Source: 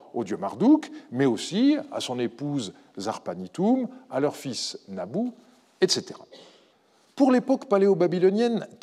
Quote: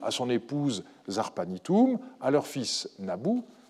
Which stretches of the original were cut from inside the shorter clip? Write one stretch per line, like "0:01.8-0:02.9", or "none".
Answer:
none